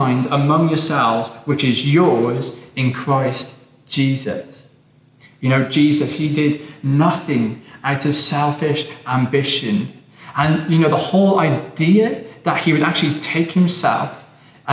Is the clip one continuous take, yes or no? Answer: yes